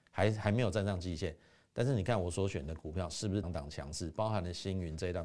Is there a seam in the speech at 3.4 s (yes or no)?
yes